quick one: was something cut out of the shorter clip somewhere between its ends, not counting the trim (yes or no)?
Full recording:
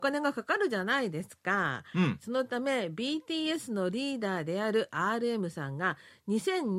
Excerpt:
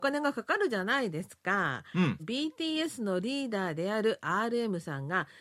yes